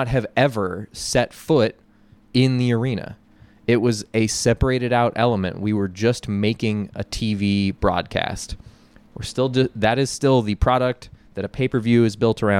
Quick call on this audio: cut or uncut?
uncut